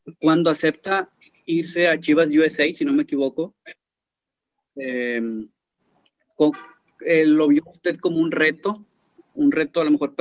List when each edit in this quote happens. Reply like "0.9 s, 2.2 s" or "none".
none